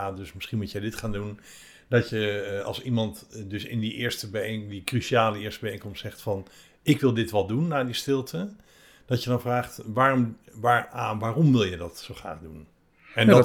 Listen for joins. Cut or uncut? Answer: uncut